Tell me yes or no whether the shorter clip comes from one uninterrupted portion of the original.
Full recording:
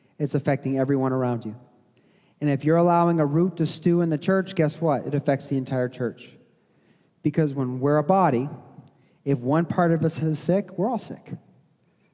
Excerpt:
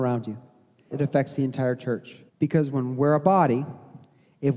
no